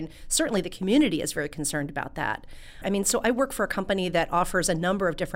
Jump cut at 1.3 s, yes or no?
no